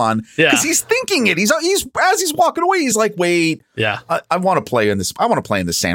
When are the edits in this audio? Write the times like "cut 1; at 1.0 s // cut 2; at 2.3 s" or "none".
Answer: none